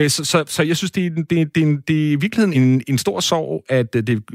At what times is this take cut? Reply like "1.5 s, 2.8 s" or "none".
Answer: 2.5 s